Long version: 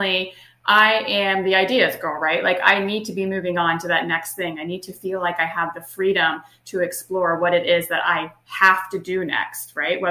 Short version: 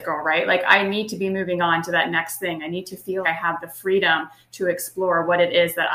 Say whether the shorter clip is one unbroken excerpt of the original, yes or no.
no